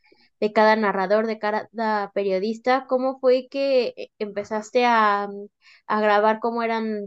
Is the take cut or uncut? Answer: uncut